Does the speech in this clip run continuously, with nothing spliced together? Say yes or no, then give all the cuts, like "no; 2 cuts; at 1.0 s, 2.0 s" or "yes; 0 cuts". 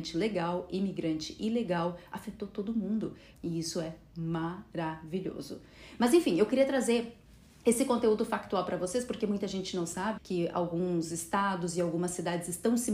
no; 2 cuts; at 3.3 s, 10.2 s